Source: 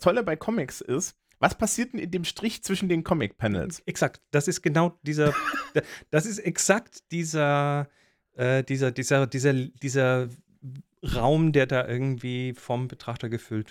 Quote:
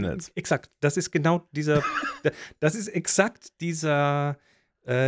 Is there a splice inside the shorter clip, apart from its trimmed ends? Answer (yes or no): no